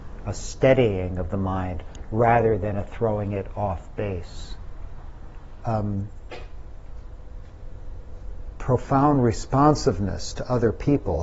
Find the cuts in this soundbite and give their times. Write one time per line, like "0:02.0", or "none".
0:05.6